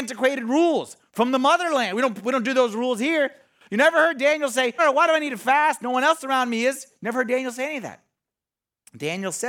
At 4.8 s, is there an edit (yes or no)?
yes